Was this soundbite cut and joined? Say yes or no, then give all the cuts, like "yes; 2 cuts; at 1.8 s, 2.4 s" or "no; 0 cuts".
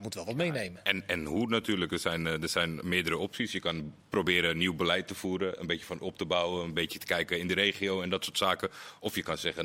no; 0 cuts